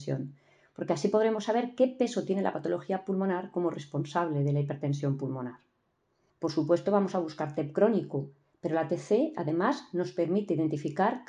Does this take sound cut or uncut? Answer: cut